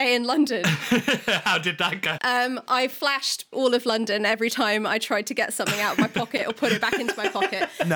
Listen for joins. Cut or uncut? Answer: cut